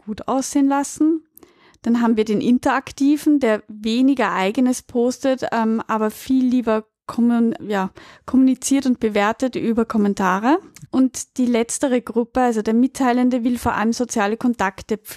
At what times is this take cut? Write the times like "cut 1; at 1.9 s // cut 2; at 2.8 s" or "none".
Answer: cut 1; at 7.6 s // cut 2; at 10.9 s